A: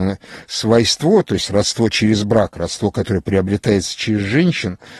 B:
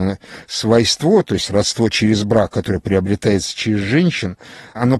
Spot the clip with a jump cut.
B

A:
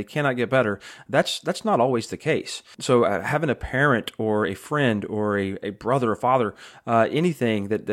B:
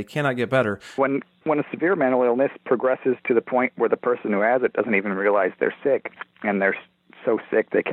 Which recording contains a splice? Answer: B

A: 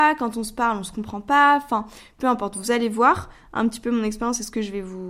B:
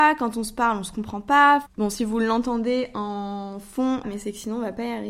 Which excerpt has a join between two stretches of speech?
B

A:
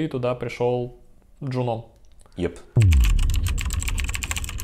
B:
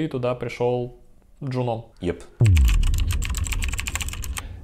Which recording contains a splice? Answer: B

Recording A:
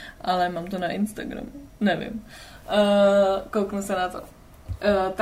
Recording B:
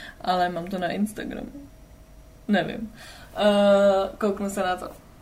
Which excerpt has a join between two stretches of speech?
A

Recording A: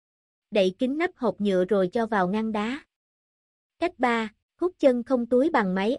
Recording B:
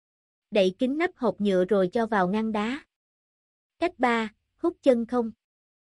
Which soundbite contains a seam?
A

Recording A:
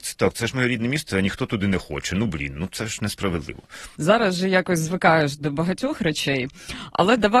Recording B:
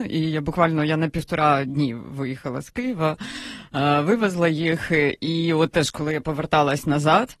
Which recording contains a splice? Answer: A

